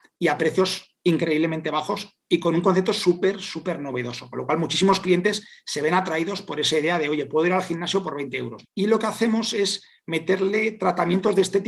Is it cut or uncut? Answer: cut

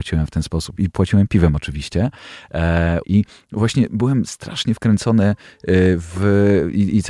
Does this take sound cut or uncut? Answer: cut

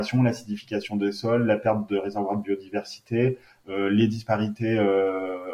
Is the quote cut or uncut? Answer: uncut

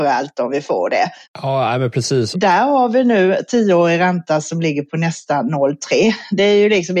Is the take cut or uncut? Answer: cut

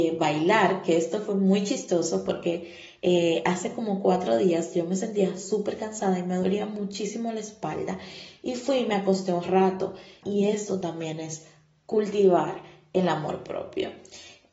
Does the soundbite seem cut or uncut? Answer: cut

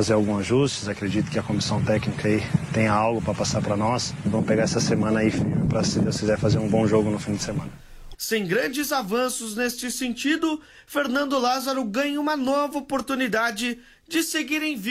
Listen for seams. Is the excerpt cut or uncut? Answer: cut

